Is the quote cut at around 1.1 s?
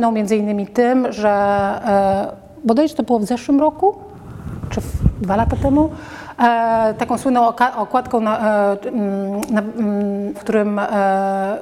no; 2 cuts; at 8.9 s, 10.3 s

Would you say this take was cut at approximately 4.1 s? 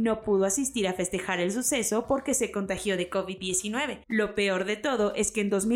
yes; 1 cut; at 4.1 s

